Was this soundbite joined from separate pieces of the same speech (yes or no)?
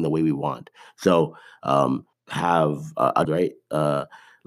yes